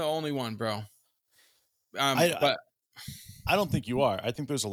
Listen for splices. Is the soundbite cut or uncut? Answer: uncut